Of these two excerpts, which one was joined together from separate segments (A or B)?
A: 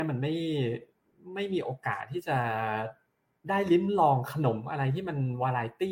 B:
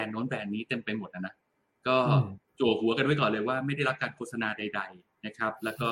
B